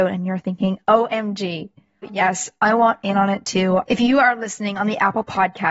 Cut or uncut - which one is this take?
cut